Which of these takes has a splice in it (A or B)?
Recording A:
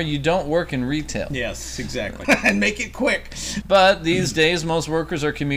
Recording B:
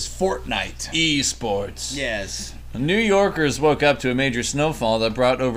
A